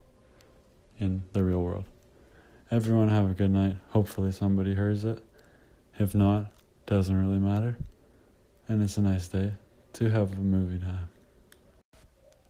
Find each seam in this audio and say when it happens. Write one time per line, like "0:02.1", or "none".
none